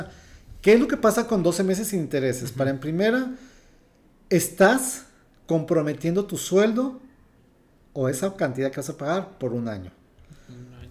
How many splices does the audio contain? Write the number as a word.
zero